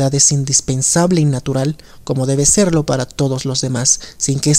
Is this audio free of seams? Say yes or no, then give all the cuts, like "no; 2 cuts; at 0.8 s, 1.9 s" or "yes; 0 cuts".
yes; 0 cuts